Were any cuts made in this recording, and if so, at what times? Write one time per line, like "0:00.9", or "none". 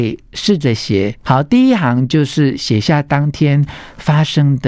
0:01.2